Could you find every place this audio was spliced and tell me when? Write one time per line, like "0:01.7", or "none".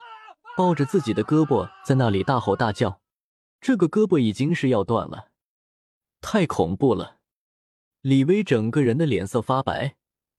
0:03.6